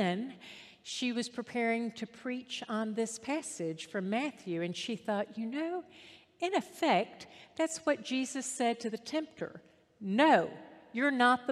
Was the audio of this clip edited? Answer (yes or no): no